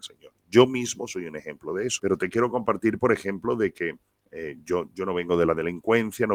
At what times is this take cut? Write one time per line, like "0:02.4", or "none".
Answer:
0:02.0

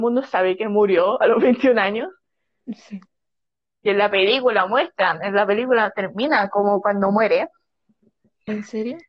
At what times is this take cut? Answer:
none

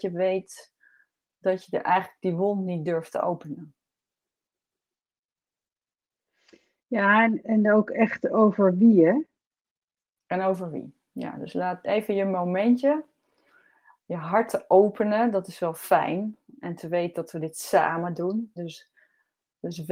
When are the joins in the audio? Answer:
0:11.8
0:18.6

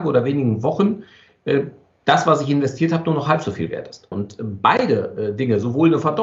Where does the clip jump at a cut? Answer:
0:04.1

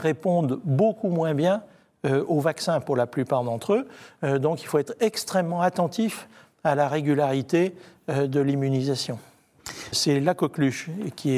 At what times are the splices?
0:09.9

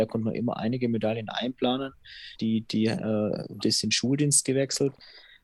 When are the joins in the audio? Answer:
0:02.3
0:03.6

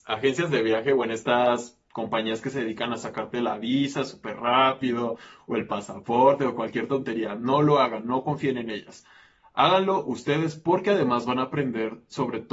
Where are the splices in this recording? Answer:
none

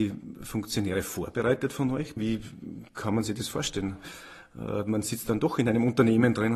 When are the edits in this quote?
0:02.2

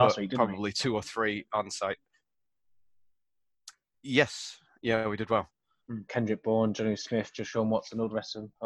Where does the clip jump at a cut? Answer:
0:06.1

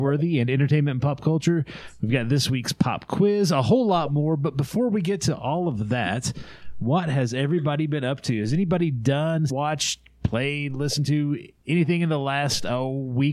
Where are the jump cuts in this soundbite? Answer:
0:09.5

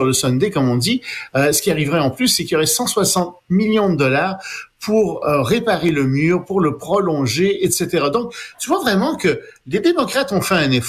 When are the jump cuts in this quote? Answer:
none

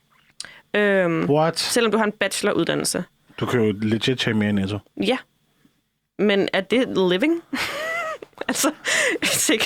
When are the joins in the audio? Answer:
none

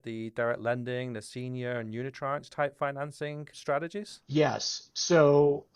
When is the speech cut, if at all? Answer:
0:03.5

